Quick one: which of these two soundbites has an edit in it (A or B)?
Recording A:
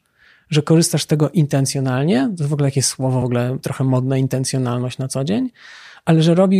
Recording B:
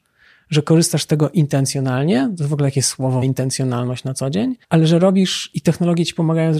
B